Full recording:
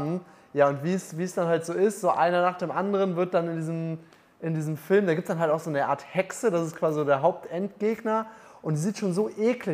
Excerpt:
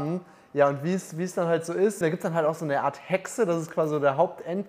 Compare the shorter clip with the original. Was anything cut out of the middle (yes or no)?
yes